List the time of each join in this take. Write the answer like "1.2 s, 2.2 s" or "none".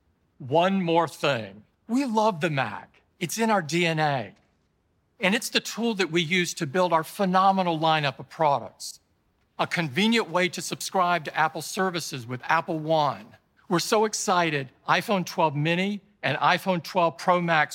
1.7 s, 9.5 s, 13.6 s